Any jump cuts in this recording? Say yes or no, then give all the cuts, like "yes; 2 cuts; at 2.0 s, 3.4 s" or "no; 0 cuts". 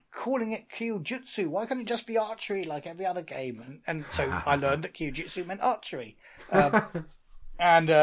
no; 0 cuts